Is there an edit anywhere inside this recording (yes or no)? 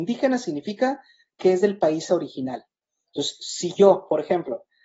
no